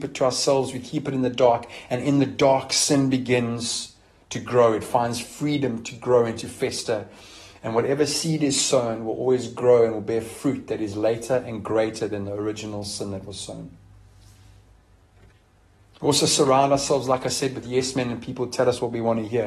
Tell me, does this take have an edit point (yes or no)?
no